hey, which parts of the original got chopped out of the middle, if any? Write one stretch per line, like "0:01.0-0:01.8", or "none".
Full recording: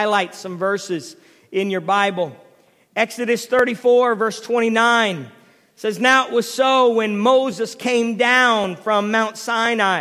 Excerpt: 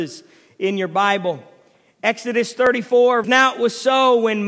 0:04.2-0:06.0